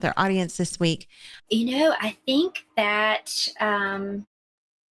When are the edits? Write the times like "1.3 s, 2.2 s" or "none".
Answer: 1.4 s